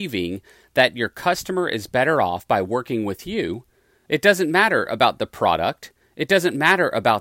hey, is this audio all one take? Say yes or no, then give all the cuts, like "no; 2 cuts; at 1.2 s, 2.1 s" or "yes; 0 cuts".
yes; 0 cuts